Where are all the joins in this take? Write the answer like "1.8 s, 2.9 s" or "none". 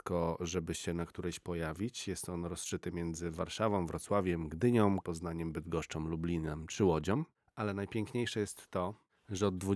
5.0 s